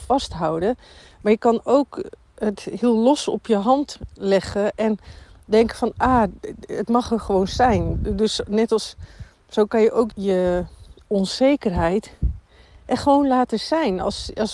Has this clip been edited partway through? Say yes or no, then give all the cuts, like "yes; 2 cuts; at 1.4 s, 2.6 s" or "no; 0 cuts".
yes; 1 cut; at 10.1 s